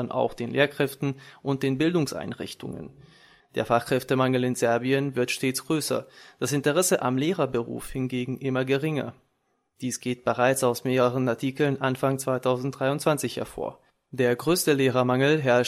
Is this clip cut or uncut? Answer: cut